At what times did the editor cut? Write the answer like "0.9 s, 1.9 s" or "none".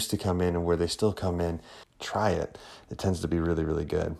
1.8 s